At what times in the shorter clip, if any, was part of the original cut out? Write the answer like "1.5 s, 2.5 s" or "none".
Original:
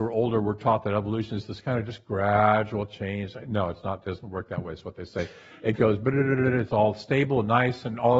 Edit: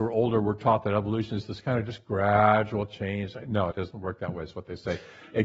3.7 s